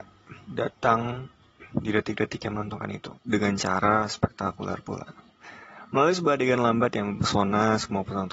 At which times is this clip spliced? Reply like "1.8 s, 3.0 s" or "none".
3.2 s